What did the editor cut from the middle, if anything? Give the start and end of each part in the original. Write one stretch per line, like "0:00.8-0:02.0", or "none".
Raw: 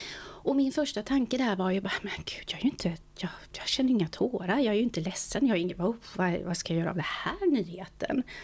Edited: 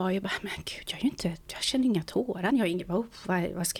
0:03.0-0:03.5
0:04.6-0:05.4